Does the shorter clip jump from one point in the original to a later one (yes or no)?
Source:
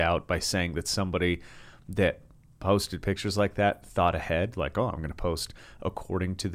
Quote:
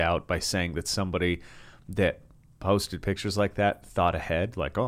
no